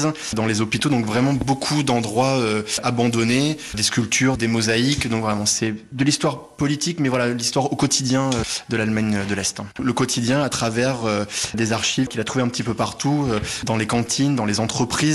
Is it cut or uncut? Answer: cut